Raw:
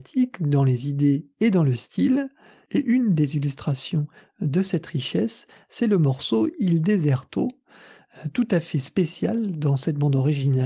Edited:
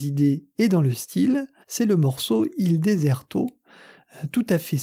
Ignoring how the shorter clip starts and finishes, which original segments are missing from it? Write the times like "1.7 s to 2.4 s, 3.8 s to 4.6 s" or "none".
2.4 s to 5.6 s